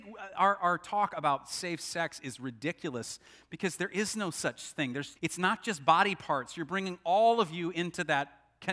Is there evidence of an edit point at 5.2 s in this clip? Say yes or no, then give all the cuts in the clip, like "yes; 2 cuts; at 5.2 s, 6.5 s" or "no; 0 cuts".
yes; 1 cut; at 5.2 s